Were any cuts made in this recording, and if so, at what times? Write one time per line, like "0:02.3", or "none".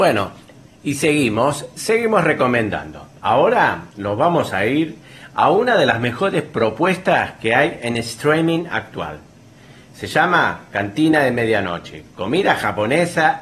none

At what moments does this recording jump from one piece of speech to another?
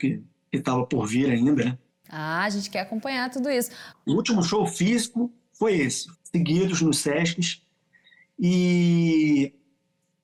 0:01.9
0:03.9
0:06.1

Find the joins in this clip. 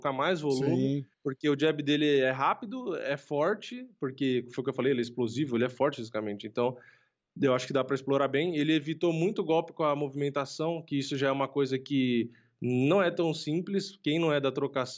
0:01.1

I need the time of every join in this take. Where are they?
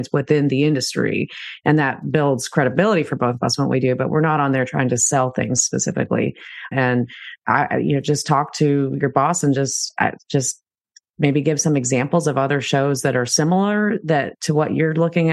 0:06.7

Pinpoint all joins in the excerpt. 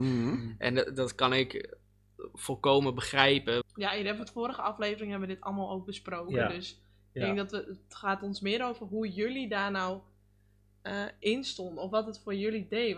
0:03.6

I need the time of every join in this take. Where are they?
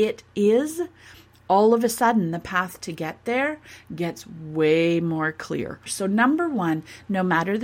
0:05.9

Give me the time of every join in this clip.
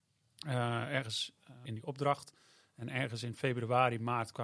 0:01.6

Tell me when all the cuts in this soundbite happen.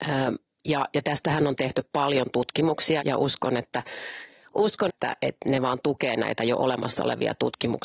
0:03.0
0:04.9

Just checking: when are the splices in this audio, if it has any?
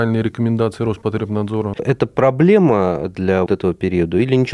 0:01.7
0:03.5

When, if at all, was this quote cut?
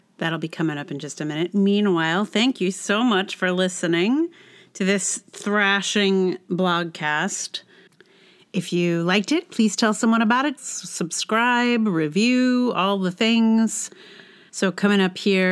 0:10.6
0:14.5

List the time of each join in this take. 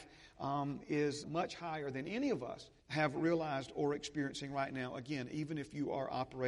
0:01.2
0:02.8

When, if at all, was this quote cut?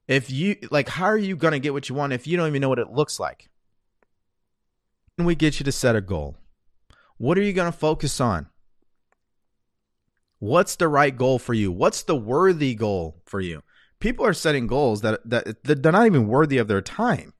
0:05.2

